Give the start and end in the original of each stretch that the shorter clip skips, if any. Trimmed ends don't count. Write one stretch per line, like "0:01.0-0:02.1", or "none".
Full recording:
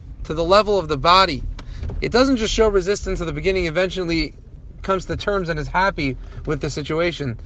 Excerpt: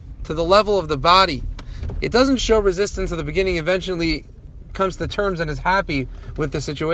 0:02.4-0:02.5